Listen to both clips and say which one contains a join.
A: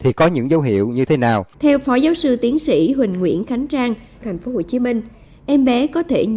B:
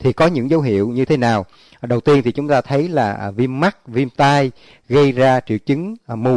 A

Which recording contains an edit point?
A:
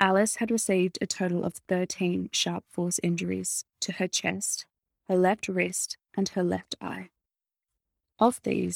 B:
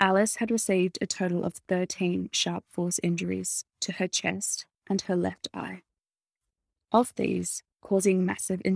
B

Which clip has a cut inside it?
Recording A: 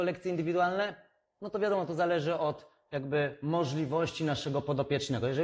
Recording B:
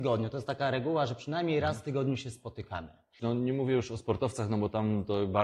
B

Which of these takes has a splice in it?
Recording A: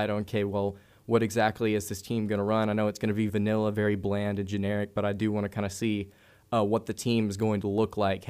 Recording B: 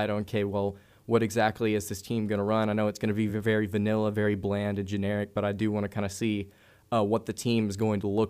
A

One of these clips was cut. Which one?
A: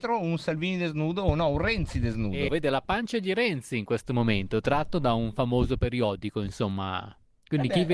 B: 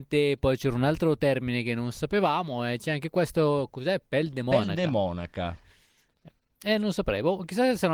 A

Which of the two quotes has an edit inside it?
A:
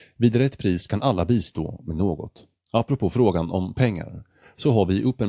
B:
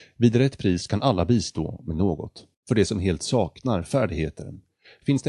B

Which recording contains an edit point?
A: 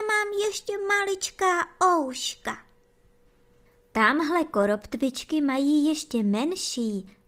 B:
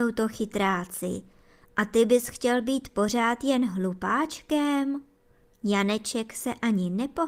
B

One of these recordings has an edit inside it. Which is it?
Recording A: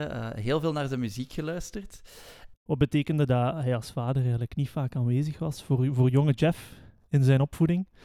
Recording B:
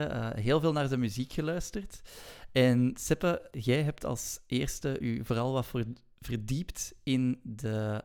A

